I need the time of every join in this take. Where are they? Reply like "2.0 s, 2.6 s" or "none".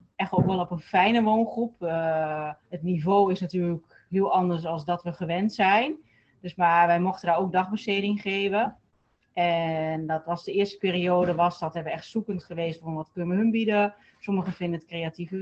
2.6 s